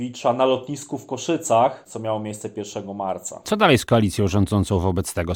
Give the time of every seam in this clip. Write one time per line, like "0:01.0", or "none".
0:01.9